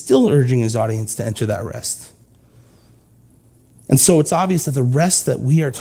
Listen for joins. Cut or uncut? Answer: uncut